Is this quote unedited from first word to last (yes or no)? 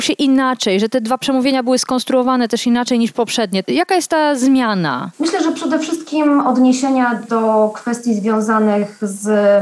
no